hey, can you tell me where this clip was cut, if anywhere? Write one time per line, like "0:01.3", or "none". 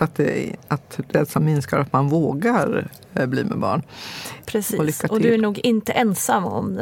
0:04.4

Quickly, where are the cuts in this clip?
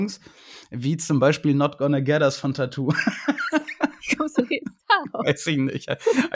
none

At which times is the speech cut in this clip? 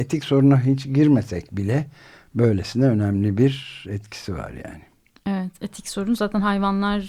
none

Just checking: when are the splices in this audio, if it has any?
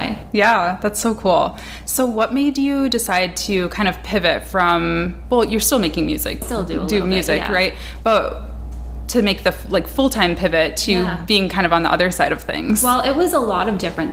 0:06.4

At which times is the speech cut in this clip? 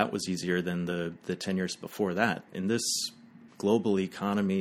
0:02.5
0:03.5

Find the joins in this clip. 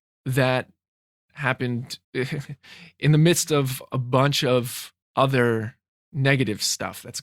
0:02.0
0:05.0

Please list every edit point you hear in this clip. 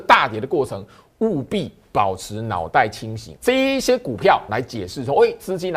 0:03.4
0:04.5

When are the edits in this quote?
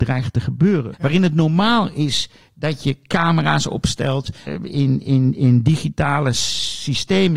0:00.9
0:04.5

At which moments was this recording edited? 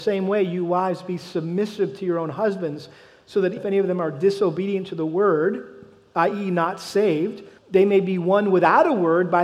0:03.6
0:07.6

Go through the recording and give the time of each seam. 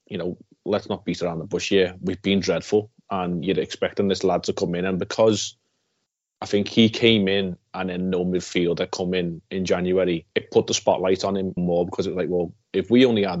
0:10.3
0:11.6

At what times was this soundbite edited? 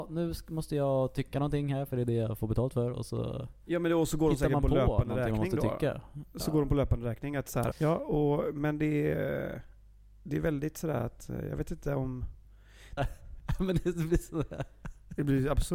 0:07.7
0:13.0

